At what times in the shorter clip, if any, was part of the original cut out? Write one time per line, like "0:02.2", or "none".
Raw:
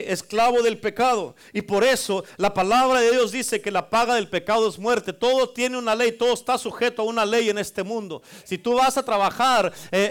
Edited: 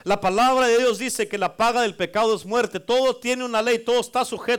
none